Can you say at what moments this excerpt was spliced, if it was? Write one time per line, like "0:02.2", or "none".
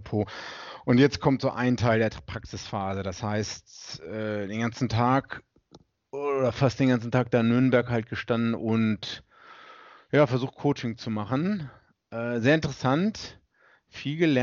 none